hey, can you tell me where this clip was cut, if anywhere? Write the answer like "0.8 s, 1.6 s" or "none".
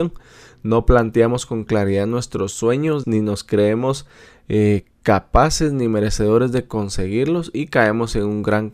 3.0 s